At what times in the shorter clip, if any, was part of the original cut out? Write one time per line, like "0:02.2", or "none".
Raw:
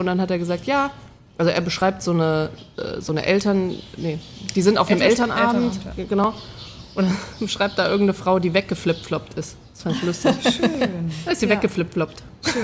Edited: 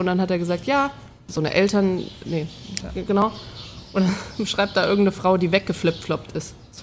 0:01.3
0:02.8

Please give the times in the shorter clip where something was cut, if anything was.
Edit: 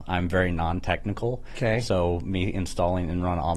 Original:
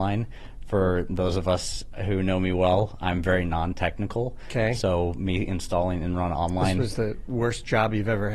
none

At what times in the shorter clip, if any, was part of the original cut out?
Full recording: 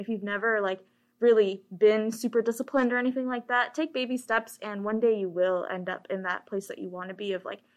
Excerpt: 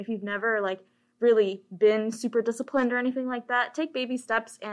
none

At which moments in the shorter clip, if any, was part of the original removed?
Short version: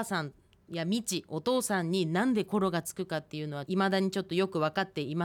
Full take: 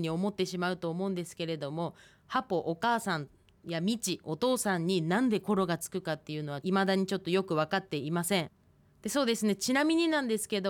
none

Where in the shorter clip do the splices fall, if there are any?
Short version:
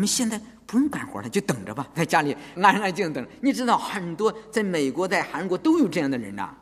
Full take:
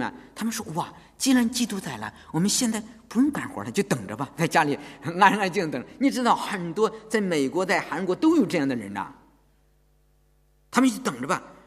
0:02.6

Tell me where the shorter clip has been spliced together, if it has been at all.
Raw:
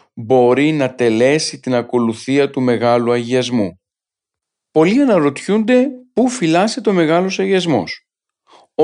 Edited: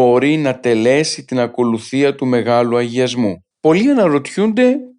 0:03.5

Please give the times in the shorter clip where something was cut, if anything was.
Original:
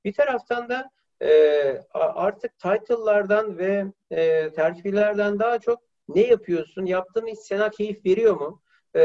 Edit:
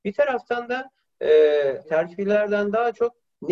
0:01.8

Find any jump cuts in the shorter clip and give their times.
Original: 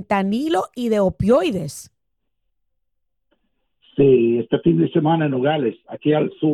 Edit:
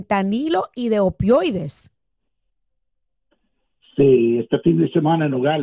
none

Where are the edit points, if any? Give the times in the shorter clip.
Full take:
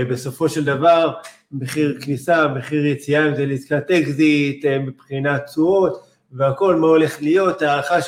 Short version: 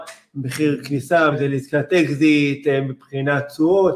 0:01.3

